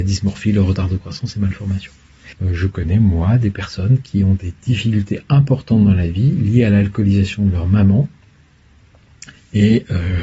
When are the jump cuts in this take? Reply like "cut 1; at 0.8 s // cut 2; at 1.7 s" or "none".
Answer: cut 1; at 2.3 s

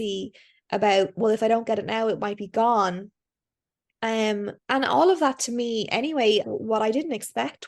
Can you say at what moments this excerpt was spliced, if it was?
cut 1; at 4.6 s // cut 2; at 6.4 s

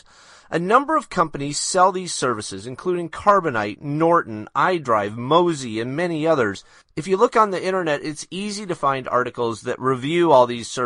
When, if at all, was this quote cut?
none

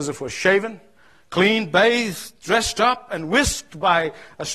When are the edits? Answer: none

